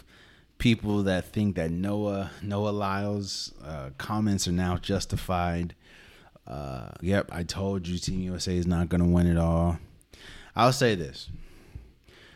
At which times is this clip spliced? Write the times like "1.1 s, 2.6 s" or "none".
7.0 s

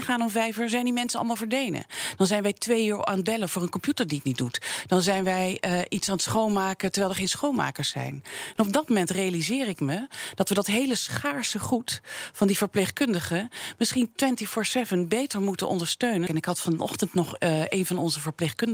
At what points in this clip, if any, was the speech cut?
16.3 s

